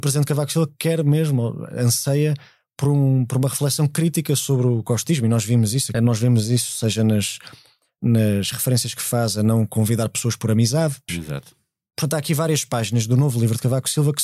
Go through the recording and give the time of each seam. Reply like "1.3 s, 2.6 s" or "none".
5.9 s, 11.1 s